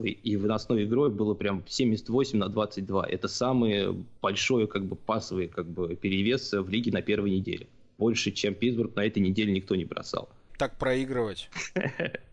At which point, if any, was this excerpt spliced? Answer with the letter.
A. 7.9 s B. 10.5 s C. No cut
B